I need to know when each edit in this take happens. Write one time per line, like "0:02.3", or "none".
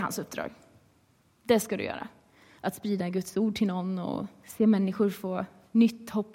0:02.6